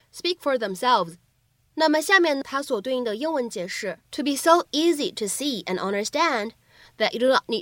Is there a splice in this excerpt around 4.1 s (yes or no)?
yes